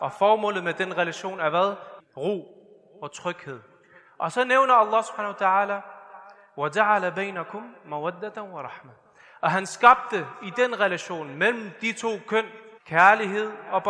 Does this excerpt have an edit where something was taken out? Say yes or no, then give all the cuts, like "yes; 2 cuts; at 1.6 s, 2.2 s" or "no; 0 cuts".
yes; 2 cuts; at 2.0 s, 12.8 s